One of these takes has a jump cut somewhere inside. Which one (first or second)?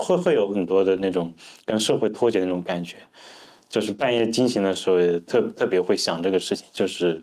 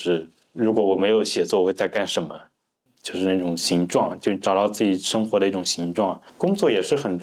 second